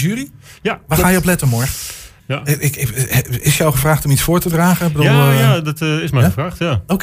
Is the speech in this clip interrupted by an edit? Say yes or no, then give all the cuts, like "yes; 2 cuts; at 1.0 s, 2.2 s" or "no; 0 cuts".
yes; 1 cut; at 2.2 s